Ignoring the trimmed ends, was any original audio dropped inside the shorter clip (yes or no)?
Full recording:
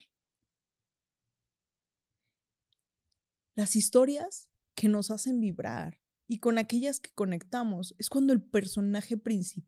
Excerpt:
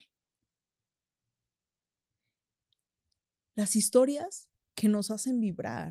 no